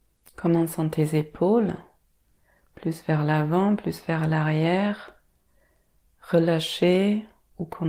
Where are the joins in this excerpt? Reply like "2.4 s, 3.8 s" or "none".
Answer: none